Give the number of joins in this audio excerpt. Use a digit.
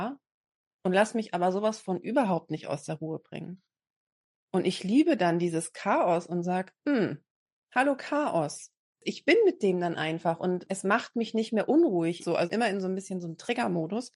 2